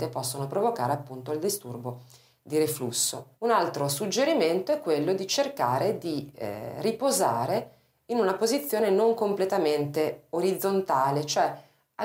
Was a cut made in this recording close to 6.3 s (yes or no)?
no